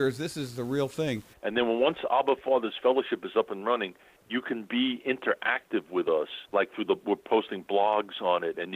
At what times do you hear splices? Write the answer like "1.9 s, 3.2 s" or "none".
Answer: 1.3 s, 6.5 s